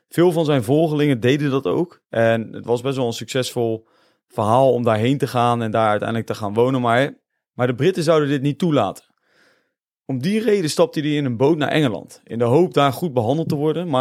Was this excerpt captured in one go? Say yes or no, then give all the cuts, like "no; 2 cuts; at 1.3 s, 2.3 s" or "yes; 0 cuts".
yes; 0 cuts